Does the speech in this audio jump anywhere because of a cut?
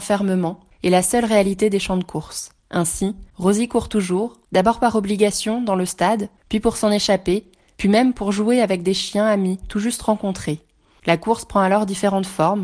yes; 2 cuts; at 2.6 s, 7.8 s

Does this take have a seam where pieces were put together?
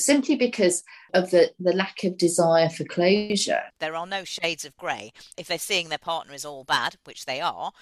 yes; 2 cuts; at 3.7 s, 5.3 s

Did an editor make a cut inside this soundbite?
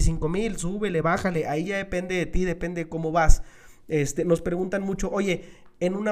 no; 0 cuts

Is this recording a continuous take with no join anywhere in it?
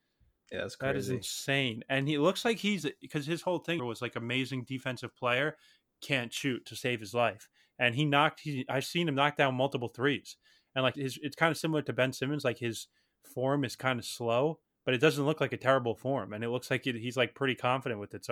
no; 2 cuts; at 3.8 s, 10.9 s

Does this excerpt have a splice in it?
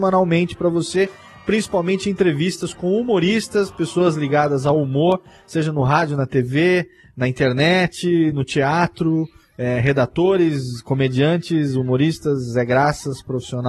no; 0 cuts

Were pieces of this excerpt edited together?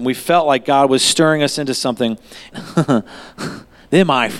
yes; 1 cut; at 2.5 s

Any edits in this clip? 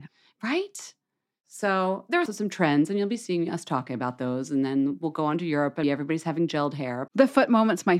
yes; 3 cuts; at 2.3 s, 5.8 s, 7.1 s

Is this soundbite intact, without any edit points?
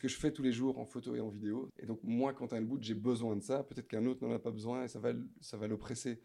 no; 1 cut; at 1.7 s

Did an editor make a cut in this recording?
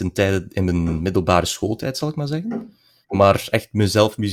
no; 0 cuts

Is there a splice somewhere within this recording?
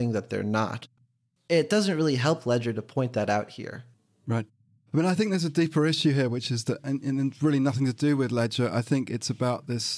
no; 0 cuts

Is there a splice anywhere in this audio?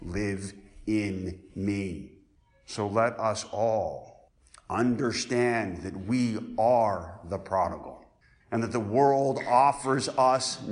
yes; 1 cut; at 8.4 s

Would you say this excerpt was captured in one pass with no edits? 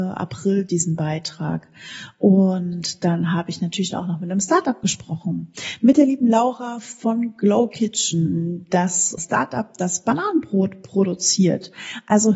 no; 1 cut; at 9.2 s

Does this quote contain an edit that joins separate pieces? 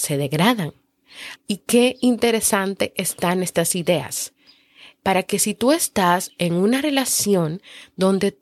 yes; 2 cuts; at 1.4 s, 5.0 s

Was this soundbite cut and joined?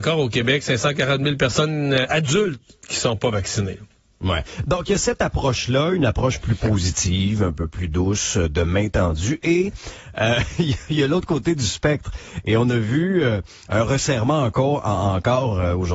no; 0 cuts

